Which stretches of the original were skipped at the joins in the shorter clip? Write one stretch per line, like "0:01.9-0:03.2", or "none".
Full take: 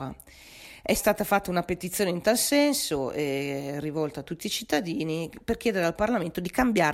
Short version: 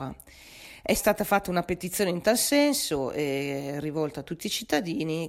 none